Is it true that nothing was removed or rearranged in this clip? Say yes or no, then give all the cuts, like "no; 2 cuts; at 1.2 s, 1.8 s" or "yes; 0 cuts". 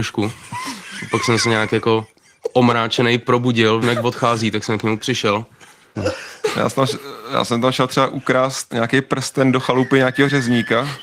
no; 3 cuts; at 3.8 s, 5.9 s, 8.7 s